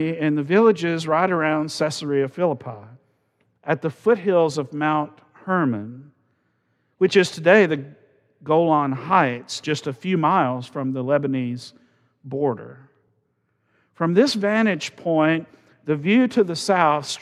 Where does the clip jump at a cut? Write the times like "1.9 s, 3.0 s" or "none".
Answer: none

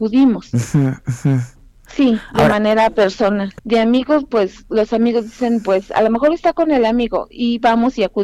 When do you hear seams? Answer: 1.9 s, 3.6 s

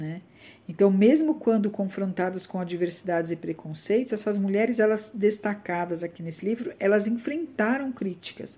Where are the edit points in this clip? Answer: none

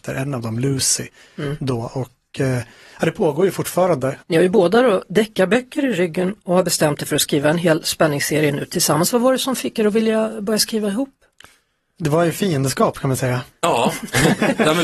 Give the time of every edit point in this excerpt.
4.2 s

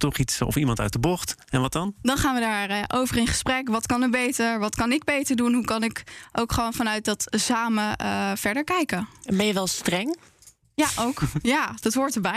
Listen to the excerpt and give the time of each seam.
none

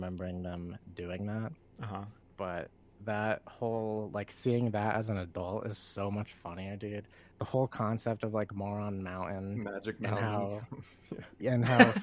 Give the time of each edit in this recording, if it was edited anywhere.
2.2 s

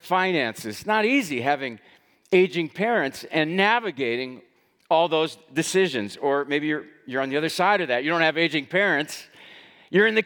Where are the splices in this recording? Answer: none

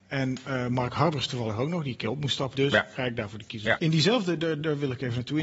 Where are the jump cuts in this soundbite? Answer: 2.5 s, 3.8 s

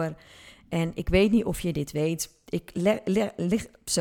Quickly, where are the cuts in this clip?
none

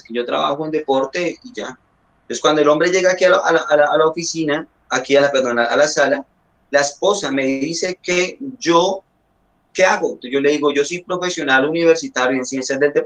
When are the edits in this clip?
none

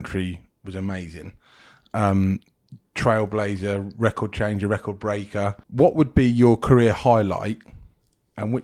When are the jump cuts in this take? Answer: 5.6 s

